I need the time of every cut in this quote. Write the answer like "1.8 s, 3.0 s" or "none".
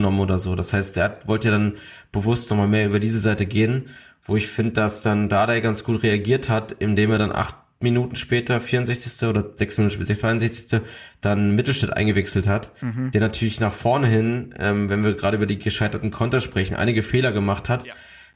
none